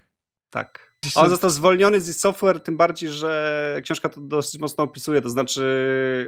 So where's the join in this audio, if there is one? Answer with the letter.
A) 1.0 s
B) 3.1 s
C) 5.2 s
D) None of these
A